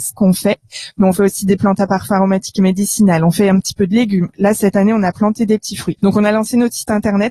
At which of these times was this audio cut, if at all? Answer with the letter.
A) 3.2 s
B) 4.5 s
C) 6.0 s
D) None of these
C